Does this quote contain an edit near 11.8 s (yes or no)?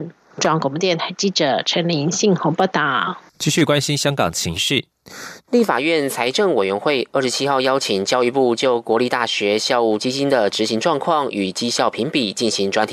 no